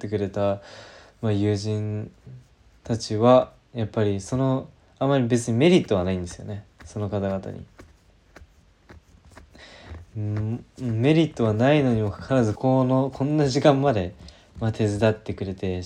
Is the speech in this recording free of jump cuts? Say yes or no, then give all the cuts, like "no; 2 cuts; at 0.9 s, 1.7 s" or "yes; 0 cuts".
no; 1 cut; at 12.6 s